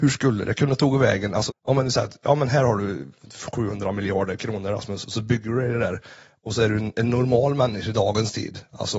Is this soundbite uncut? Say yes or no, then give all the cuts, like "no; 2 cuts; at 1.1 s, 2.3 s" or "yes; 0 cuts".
no; 1 cut; at 1.5 s